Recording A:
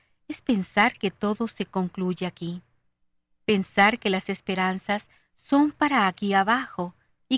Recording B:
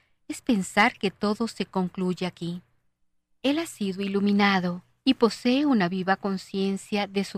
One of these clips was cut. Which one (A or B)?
B